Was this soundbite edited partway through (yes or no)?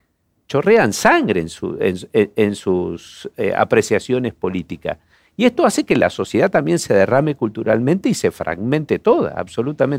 no